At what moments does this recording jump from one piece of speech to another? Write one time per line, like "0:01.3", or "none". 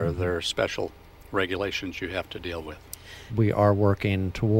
0:03.3